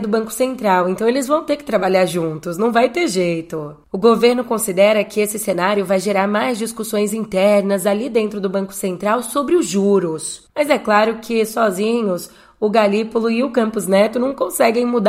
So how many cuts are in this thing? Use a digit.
1